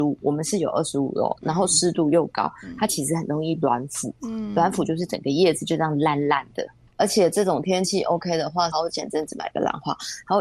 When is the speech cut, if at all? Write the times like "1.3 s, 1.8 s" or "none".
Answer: 6.9 s, 8.7 s